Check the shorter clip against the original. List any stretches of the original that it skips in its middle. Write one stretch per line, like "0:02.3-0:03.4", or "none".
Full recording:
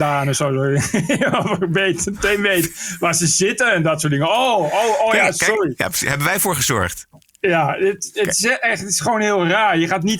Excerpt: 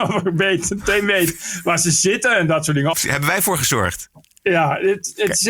0:04.3-0:05.9